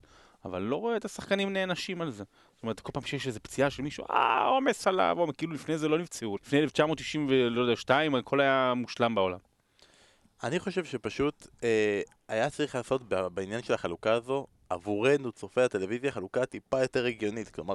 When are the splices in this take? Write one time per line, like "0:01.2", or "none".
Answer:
0:06.4